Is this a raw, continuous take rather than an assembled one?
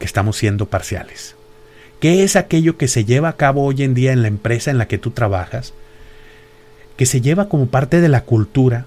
yes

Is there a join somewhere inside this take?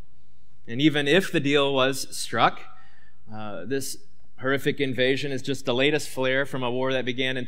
no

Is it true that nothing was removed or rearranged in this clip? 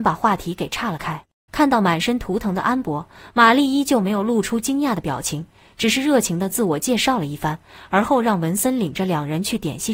no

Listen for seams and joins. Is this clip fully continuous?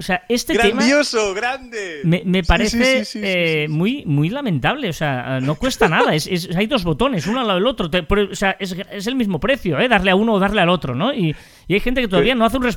yes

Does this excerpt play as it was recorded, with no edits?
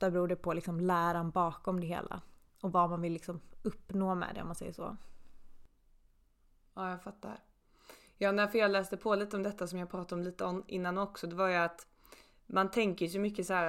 yes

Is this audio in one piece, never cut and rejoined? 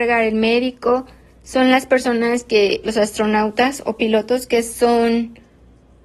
yes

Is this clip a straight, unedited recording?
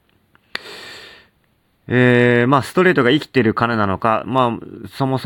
yes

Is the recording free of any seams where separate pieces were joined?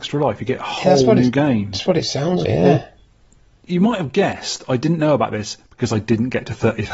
no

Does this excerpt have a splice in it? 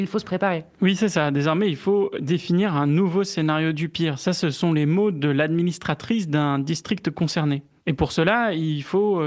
no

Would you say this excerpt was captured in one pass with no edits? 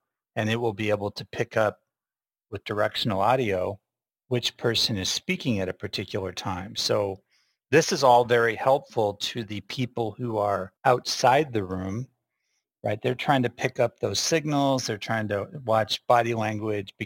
no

